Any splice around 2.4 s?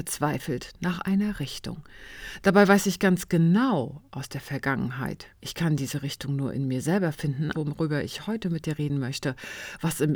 no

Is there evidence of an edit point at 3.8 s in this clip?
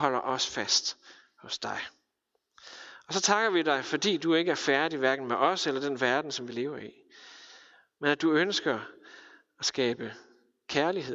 no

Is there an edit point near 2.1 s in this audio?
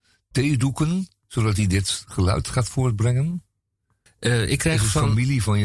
no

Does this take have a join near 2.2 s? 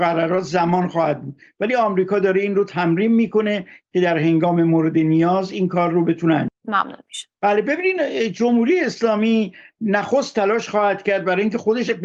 no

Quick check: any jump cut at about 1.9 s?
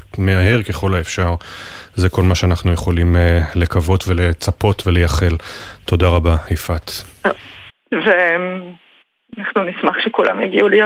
no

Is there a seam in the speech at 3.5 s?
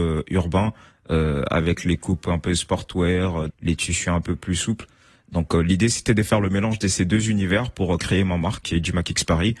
yes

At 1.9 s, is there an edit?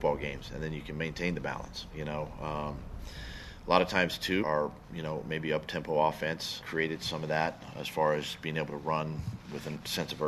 no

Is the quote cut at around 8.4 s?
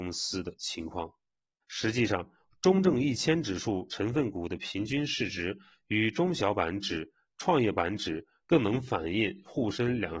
yes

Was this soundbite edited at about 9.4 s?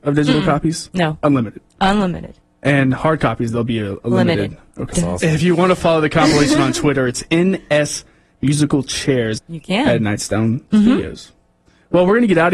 yes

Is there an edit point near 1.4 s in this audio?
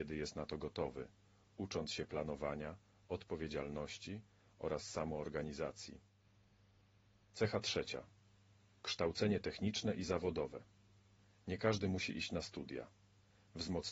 no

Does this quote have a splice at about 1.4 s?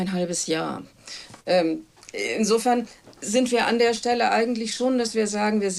no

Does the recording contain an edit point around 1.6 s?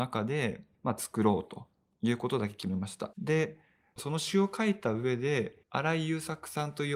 no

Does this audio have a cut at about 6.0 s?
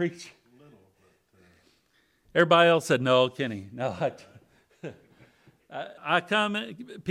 yes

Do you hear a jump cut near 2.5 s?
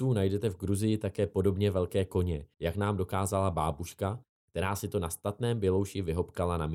yes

